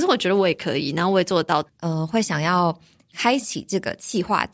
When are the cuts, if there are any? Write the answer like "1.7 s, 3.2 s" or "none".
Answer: 1.7 s